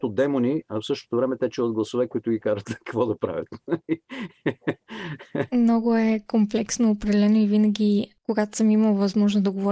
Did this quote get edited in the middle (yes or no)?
no